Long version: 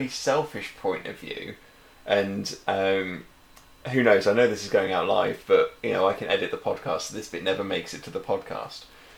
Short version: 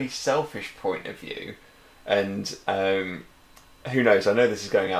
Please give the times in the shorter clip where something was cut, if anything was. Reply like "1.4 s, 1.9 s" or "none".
none